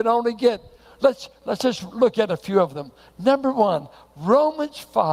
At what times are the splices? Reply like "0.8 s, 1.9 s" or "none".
none